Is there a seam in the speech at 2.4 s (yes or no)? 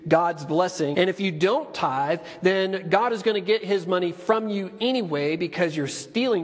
no